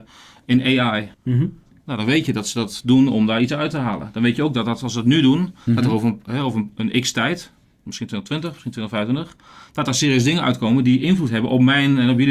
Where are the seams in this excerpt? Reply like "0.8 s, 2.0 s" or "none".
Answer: 1.1 s